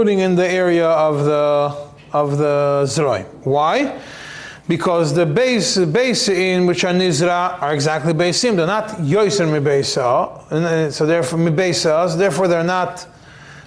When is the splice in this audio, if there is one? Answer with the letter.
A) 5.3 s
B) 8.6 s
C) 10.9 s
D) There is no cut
D